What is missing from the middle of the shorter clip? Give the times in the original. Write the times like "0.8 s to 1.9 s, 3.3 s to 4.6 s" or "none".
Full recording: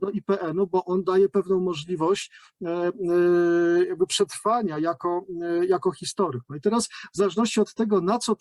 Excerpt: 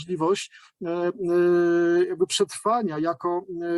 none